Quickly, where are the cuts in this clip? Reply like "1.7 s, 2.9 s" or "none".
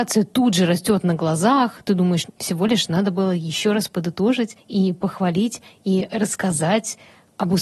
2.3 s